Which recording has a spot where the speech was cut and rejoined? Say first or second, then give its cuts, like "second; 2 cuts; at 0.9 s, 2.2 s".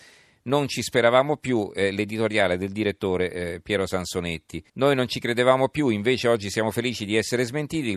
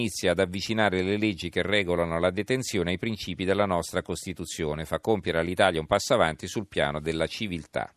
first; 1 cut; at 4.7 s